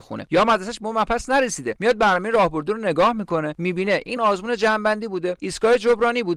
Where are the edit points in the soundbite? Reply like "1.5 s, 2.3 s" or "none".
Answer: 4.2 s

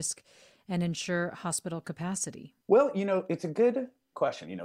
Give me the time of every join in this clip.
2.6 s

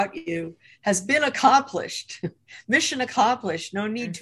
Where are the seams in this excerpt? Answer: none

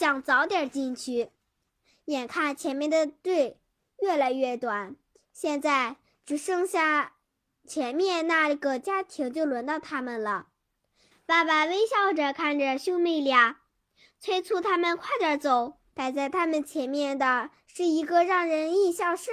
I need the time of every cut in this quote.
11.1 s, 15.9 s

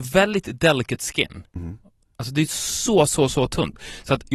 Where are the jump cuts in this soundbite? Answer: none

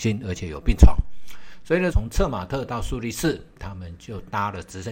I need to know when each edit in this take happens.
1.9 s

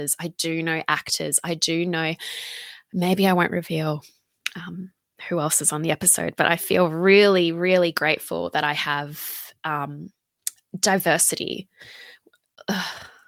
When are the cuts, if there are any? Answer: none

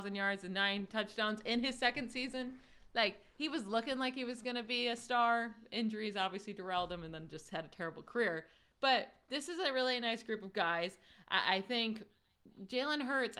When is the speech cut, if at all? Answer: none

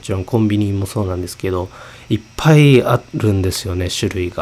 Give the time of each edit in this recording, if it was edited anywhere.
3.1 s

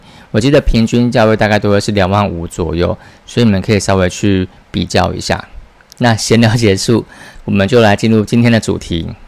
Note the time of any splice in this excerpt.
5.9 s

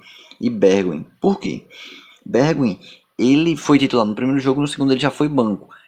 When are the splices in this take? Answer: none

